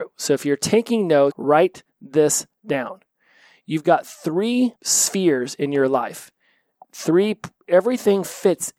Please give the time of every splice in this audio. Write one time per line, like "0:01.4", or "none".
0:01.3
0:04.8